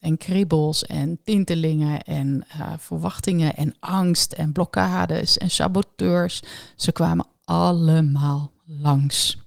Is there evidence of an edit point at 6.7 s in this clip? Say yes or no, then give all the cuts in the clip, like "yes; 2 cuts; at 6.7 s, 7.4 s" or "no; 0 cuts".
no; 0 cuts